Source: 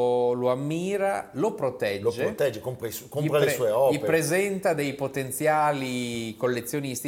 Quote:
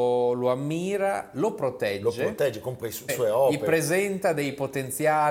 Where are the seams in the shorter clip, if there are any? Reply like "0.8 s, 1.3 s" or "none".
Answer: 3.1 s